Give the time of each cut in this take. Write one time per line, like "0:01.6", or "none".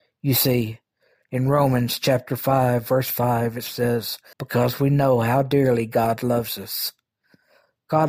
0:04.3